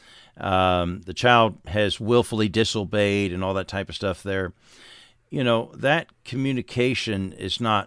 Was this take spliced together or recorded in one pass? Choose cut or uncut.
uncut